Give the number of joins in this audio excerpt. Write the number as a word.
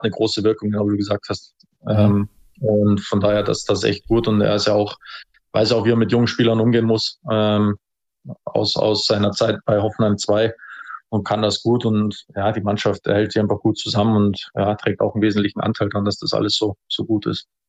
zero